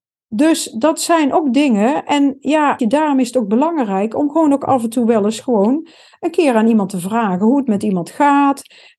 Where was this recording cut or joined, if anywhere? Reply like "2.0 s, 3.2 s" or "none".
2.8 s